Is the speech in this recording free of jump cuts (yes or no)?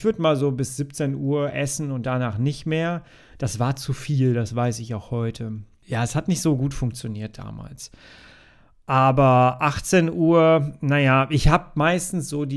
yes